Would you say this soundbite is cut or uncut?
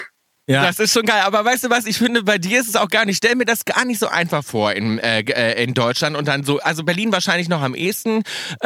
uncut